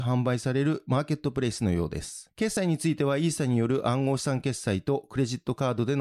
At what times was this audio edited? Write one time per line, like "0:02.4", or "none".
none